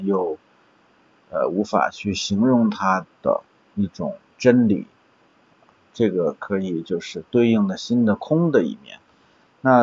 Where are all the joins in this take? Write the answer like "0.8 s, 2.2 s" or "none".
none